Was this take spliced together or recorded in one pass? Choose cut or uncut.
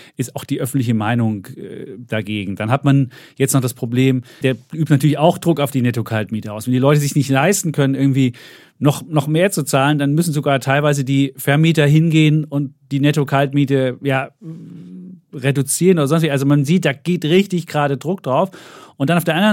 cut